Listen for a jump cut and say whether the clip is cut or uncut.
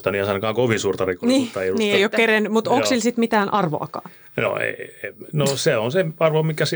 uncut